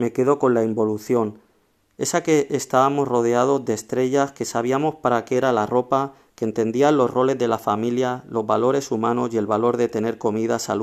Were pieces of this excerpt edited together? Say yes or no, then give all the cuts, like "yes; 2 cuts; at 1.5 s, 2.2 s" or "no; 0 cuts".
no; 0 cuts